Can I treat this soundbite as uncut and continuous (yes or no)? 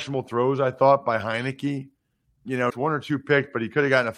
no